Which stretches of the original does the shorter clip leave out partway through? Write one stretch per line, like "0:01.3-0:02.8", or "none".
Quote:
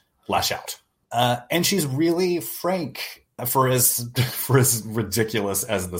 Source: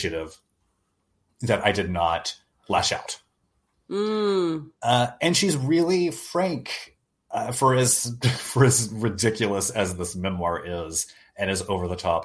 0:03.4-0:04.7
0:07.1-0:07.5